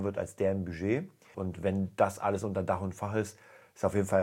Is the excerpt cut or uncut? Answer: cut